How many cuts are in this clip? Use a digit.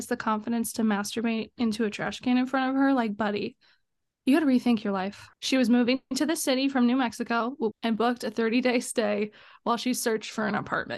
2